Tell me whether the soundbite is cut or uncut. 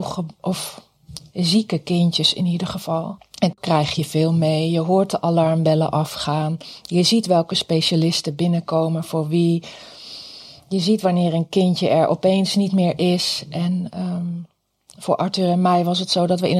uncut